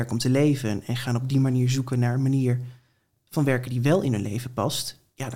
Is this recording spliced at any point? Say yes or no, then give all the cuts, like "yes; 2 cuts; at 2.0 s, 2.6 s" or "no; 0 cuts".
no; 0 cuts